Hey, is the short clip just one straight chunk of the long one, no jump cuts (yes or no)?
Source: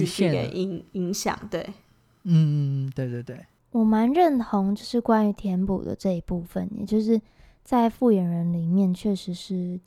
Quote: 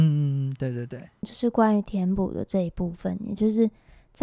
no